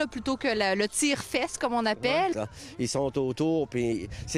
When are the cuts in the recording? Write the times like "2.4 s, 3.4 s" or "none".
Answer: 2.3 s